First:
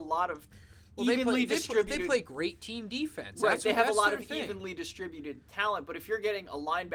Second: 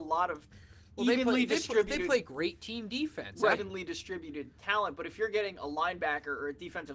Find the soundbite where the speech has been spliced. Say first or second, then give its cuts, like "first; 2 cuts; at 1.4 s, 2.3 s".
second; 1 cut; at 3.5 s